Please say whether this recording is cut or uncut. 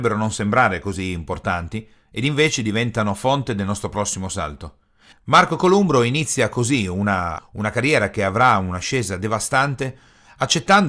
cut